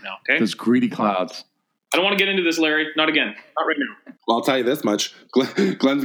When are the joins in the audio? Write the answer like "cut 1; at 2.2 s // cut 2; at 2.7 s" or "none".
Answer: cut 1; at 4.2 s